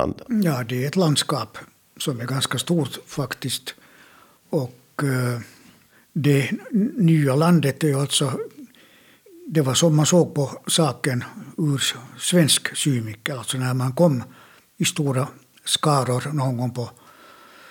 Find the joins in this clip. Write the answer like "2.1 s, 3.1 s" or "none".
none